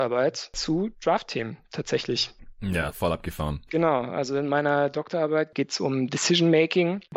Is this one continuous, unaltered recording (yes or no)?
yes